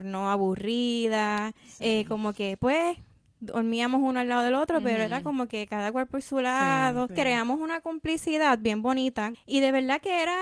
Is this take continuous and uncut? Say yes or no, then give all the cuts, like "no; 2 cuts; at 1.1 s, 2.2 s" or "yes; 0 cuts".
no; 2 cuts; at 7.1 s, 9.3 s